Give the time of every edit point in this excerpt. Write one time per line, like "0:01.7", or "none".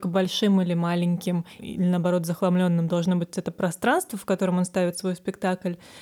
0:01.6